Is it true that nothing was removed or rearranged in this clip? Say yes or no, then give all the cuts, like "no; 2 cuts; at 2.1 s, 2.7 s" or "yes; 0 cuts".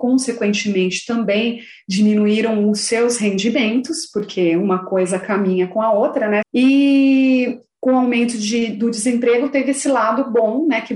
no; 1 cut; at 6.4 s